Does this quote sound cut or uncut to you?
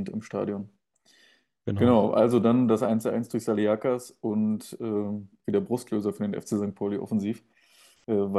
cut